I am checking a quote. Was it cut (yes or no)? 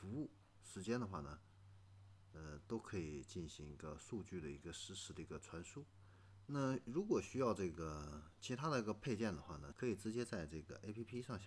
yes